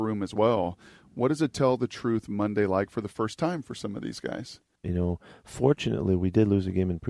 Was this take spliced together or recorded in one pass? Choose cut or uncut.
cut